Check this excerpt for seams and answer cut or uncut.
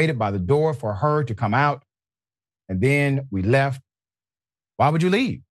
uncut